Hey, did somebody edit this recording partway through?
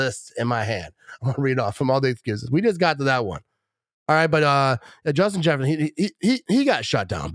no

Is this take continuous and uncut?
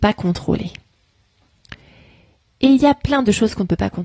yes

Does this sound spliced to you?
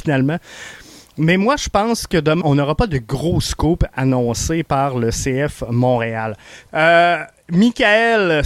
yes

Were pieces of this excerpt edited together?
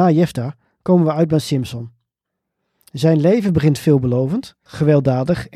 yes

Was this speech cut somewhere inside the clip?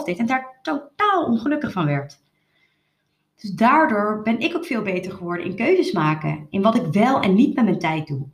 no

